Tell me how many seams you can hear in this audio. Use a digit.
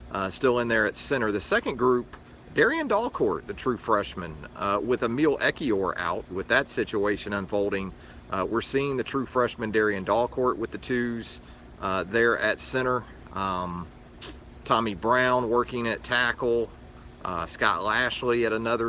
1